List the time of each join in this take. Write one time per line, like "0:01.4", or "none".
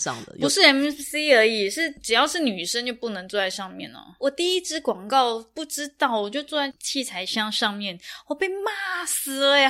none